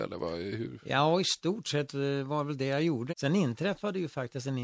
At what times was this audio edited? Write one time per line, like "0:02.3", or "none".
0:03.1